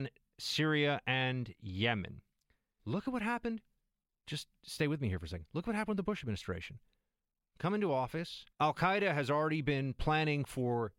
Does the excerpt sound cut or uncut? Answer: cut